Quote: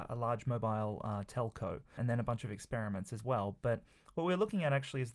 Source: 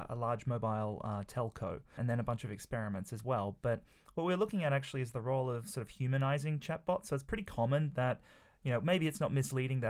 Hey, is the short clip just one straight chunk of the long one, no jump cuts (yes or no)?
yes